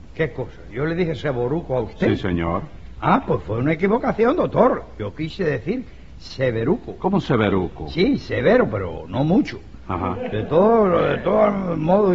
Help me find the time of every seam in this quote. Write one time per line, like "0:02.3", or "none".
none